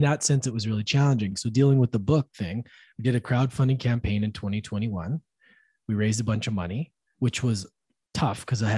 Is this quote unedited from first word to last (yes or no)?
yes